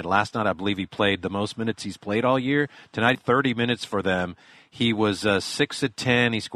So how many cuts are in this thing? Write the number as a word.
one